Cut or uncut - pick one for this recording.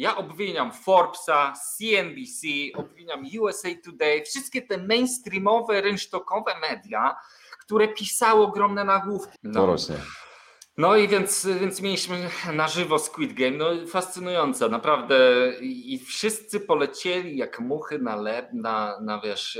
cut